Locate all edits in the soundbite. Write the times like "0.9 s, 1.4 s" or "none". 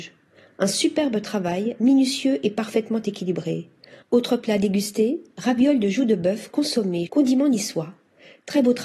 4.0 s, 7.1 s